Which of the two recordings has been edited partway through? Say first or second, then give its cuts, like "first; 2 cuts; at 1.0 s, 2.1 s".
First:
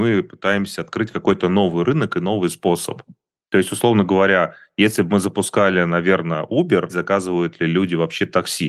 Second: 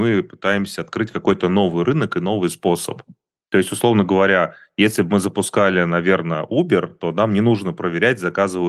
first; 1 cut; at 6.9 s